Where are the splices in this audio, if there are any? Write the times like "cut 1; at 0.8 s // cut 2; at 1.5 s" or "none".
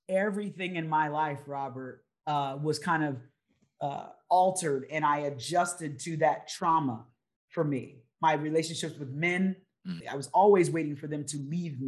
cut 1; at 10.0 s